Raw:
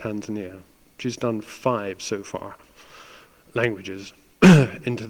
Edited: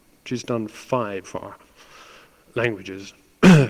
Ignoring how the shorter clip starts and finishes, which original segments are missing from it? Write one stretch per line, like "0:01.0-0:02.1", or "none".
0:02.0-0:02.2